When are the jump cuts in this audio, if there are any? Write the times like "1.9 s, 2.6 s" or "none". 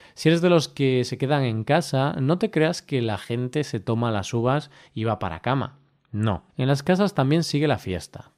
6.5 s

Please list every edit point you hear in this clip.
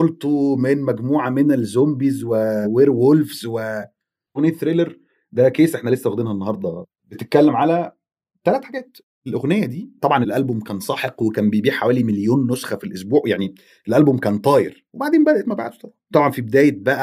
4.4 s

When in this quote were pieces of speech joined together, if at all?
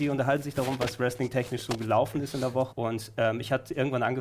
2.7 s

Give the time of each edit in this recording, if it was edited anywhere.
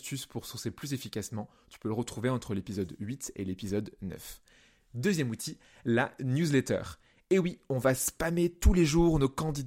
none

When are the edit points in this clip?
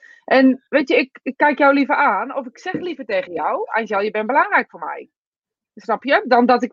none

